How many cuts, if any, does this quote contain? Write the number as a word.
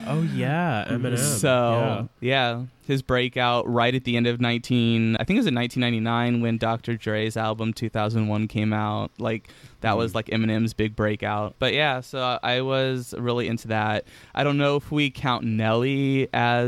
one